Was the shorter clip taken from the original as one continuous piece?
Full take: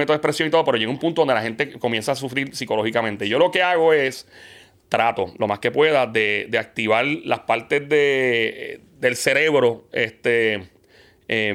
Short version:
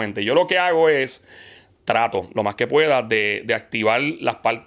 yes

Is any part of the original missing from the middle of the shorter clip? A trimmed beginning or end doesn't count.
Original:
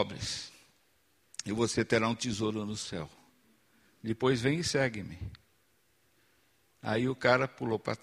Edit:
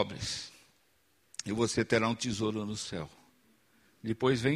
no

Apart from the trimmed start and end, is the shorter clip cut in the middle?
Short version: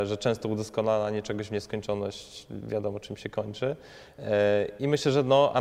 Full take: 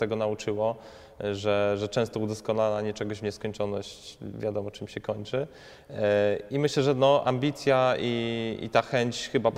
no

